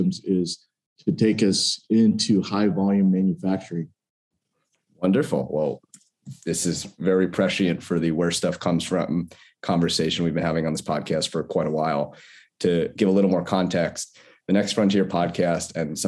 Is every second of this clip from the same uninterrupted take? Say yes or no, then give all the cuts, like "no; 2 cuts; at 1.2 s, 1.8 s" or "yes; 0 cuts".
yes; 0 cuts